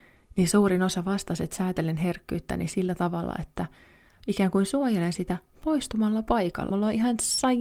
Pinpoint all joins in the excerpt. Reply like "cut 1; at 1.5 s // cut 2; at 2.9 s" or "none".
cut 1; at 6.7 s